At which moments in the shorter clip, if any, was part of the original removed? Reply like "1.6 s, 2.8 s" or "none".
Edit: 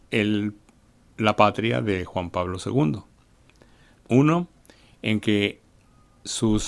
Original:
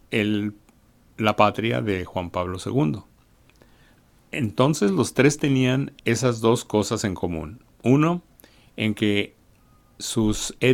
4.0 s